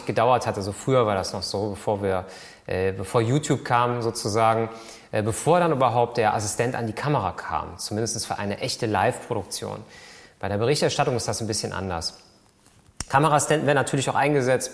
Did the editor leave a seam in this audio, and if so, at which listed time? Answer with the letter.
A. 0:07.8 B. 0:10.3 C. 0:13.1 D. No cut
D